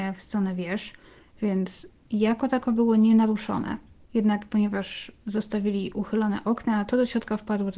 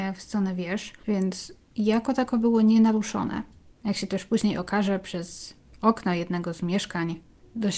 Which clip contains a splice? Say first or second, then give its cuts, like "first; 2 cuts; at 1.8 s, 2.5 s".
second; 2 cuts; at 1.0 s, 3.7 s